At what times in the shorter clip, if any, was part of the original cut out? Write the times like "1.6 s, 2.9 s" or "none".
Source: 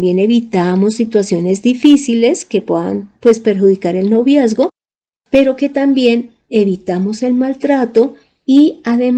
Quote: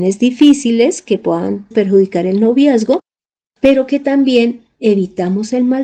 1.7 s